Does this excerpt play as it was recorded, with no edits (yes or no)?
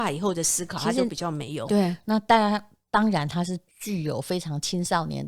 no